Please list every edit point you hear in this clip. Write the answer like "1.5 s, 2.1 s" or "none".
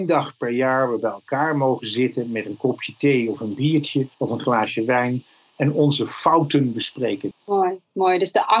4.1 s, 7.3 s

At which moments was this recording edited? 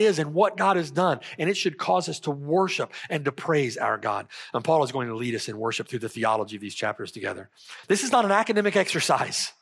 7.8 s

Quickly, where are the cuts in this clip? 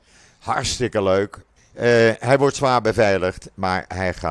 1.6 s

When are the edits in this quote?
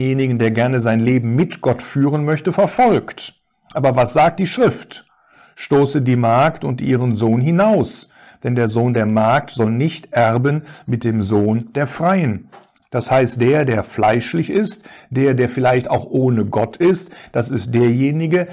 12.8 s

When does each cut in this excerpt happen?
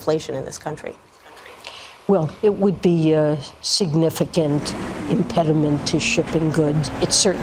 5.0 s

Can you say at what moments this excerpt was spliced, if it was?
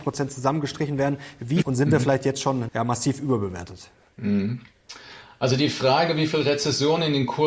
1.6 s, 2.7 s

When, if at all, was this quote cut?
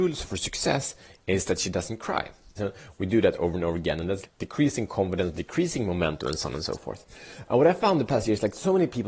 2.6 s, 4.2 s

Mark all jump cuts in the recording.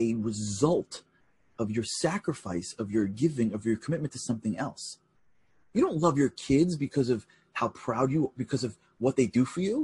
none

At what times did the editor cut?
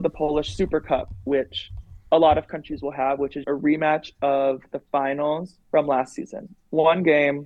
3.4 s, 5.6 s

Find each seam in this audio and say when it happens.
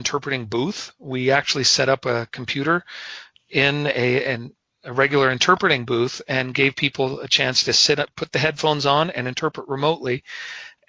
none

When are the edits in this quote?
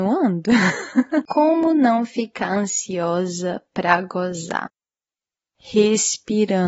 1.3 s

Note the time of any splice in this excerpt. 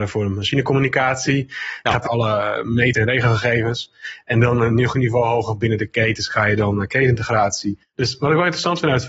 2.0 s, 7.9 s

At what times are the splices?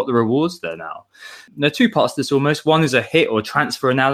none

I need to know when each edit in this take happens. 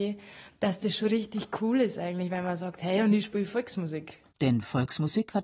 4.3 s

